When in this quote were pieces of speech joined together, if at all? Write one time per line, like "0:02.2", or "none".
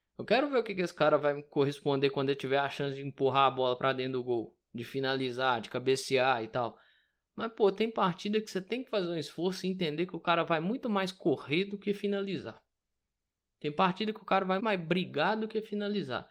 0:14.6